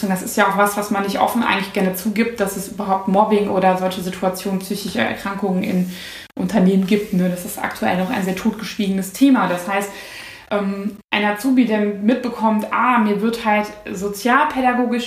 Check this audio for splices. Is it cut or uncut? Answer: uncut